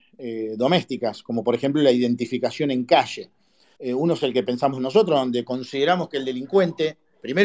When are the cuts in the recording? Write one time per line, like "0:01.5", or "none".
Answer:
0:03.8